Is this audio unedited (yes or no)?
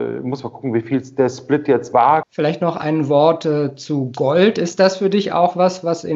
no